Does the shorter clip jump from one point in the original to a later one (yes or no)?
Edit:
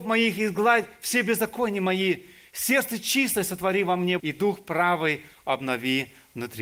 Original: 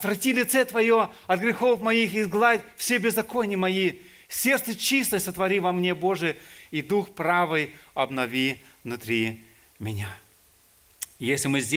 yes